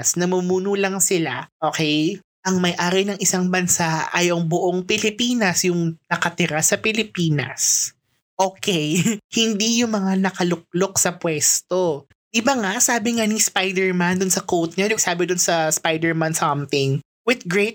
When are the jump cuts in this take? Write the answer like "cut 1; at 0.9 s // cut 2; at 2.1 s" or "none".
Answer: cut 1; at 12.1 s // cut 2; at 15.0 s